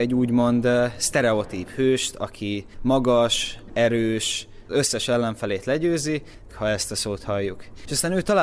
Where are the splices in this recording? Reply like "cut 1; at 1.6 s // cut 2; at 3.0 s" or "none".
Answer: cut 1; at 4.7 s // cut 2; at 6.5 s